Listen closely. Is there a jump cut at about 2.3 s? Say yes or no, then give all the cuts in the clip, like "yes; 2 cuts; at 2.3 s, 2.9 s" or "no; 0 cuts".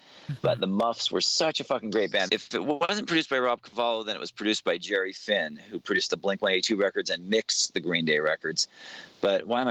yes; 1 cut; at 2.3 s